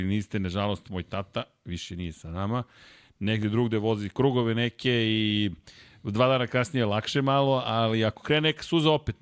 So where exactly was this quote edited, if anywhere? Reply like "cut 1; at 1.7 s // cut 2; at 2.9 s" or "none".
none